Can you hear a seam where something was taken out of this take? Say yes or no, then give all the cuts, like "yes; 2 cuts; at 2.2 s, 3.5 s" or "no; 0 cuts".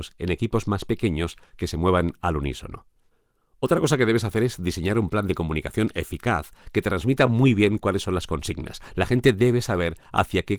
no; 0 cuts